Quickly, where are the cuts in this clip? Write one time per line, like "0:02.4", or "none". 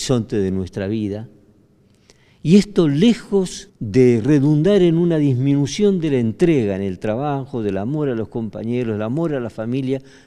0:03.7